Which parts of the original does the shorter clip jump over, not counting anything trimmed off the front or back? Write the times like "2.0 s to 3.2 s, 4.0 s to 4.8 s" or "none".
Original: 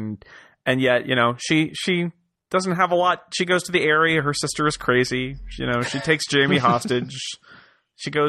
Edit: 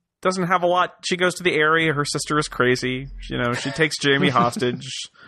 none